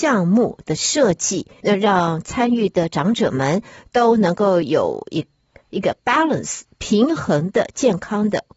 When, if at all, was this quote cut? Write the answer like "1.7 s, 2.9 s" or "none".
1.6 s